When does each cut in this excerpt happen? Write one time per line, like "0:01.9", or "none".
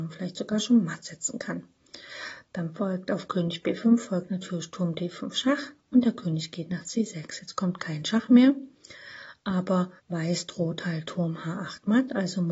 0:10.0